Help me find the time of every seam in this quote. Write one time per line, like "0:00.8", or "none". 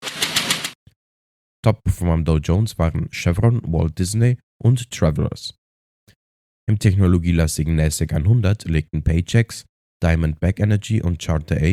0:06.5